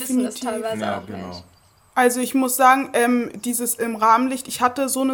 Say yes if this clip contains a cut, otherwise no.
no